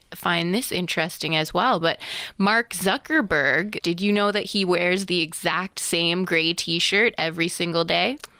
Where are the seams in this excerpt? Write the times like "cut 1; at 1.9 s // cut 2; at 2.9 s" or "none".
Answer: cut 1; at 3.8 s